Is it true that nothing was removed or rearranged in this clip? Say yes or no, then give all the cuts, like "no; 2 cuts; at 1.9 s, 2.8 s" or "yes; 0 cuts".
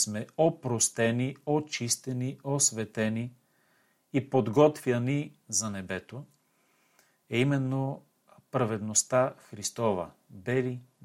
yes; 0 cuts